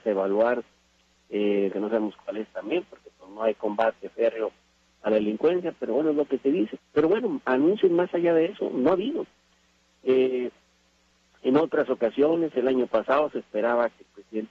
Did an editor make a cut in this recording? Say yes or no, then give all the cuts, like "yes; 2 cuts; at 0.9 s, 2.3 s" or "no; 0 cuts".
yes; 2 cuts; at 1.7 s, 6.8 s